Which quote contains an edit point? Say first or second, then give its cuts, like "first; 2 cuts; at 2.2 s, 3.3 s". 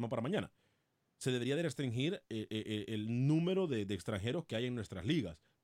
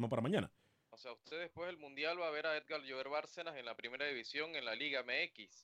second; 1 cut; at 0.9 s